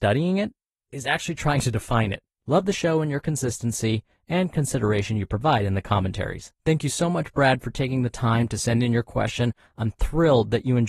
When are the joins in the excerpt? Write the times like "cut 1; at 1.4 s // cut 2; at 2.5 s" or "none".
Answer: cut 1; at 2.4 s // cut 2; at 6.6 s